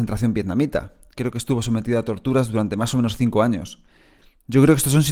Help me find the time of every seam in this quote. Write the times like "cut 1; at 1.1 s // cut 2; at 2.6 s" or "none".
none

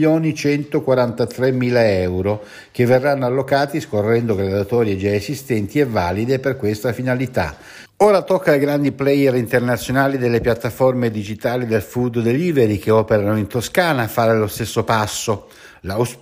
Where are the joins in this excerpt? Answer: cut 1; at 7.9 s

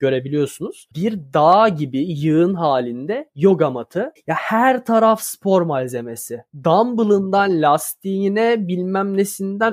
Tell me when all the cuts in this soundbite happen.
cut 1; at 0.9 s // cut 2; at 4.2 s

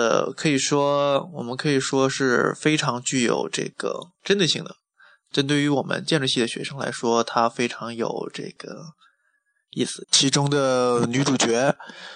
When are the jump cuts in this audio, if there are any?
cut 1; at 10.0 s

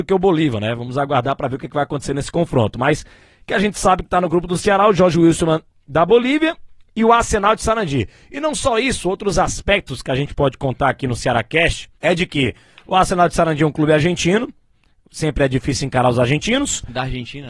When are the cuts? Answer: cut 1; at 12.0 s

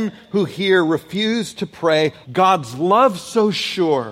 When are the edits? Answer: cut 1; at 2.2 s

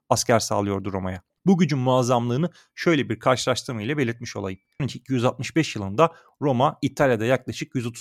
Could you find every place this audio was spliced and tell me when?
cut 1; at 1.3 s // cut 2; at 4.8 s

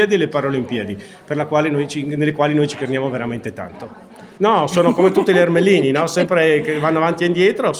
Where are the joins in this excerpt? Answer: cut 1; at 4.4 s

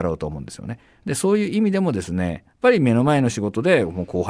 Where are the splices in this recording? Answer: none

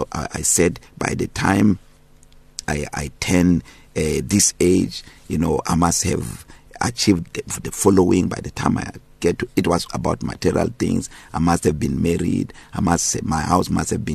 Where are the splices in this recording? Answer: cut 1; at 2.6 s // cut 2; at 9.9 s

